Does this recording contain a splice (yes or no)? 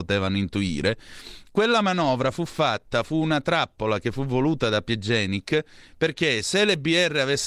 no